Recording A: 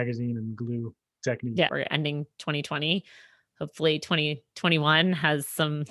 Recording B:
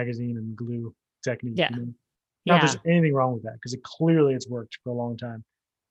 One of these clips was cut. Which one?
A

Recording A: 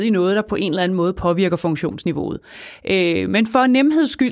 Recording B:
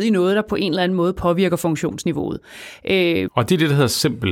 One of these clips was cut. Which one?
B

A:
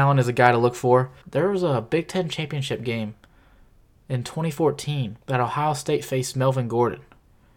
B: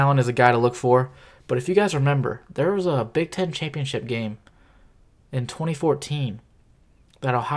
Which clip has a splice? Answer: A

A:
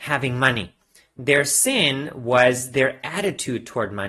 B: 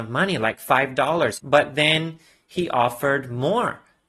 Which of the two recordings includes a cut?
B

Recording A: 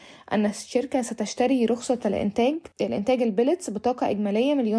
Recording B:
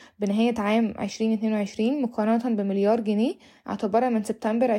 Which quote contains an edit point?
A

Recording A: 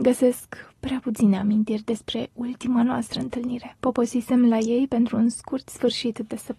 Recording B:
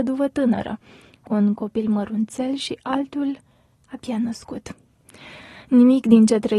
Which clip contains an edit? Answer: A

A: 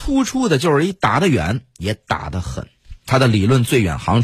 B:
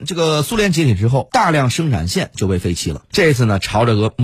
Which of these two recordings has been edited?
B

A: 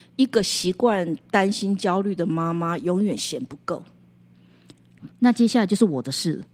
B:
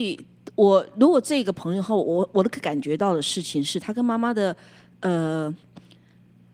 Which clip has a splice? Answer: A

